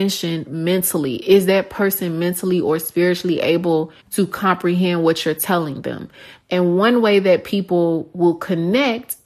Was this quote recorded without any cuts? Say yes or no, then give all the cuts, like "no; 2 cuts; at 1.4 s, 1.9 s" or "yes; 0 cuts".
no; 2 cuts; at 4.0 s, 6.4 s